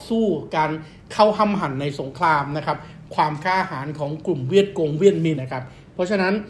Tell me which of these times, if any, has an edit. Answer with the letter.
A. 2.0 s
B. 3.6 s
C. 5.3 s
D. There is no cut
C